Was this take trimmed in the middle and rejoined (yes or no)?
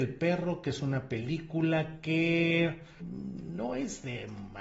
yes